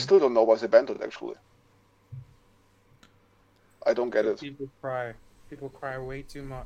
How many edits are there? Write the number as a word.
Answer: zero